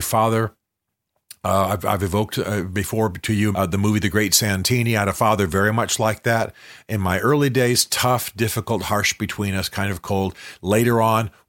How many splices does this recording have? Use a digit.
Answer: 1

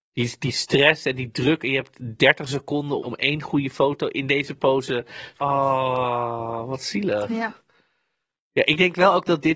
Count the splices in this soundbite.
2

